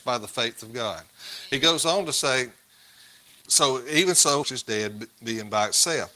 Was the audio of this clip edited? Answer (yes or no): yes